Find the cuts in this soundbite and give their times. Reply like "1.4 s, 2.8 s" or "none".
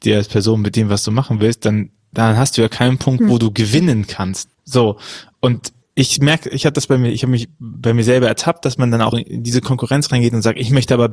4.5 s, 5.8 s, 9.1 s